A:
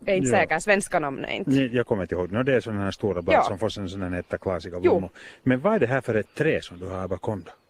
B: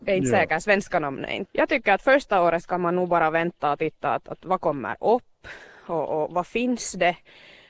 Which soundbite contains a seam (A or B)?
B